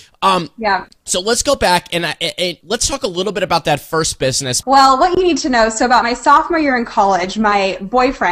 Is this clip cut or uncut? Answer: cut